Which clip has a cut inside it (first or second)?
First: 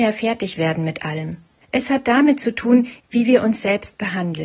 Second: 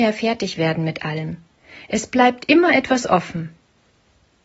first